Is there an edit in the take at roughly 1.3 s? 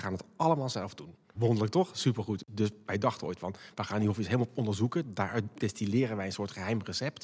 yes; 1 cut; at 1.3 s

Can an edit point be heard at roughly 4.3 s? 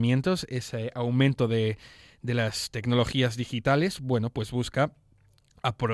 no; 0 cuts

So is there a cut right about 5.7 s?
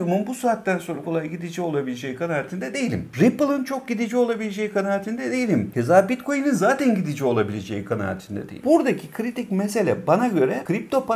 no; 2 cuts; at 1.0 s, 8.6 s

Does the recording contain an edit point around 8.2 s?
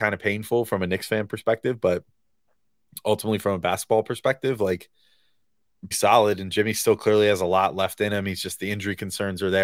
no; 1 cut; at 5.9 s

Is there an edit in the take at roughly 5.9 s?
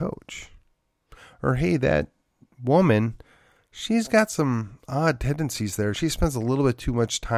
no; 0 cuts

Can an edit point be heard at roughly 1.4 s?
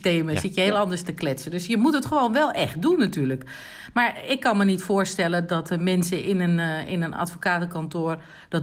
no; 0 cuts

